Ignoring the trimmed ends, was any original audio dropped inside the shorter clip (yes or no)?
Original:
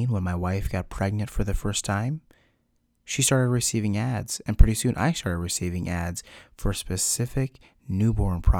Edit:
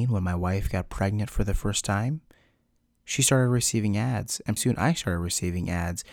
yes